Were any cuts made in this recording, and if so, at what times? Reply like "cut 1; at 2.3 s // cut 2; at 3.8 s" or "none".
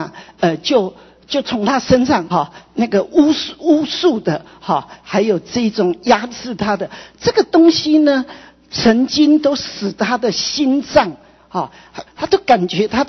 cut 1; at 2.3 s // cut 2; at 12.1 s